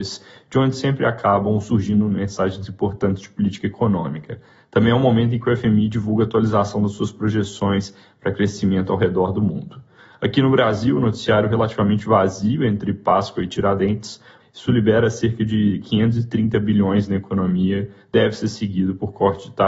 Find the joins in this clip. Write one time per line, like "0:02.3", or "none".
0:14.4